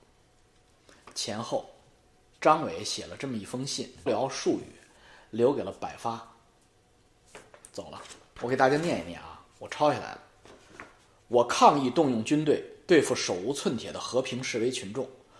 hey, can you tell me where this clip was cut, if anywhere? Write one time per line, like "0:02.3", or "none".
0:04.1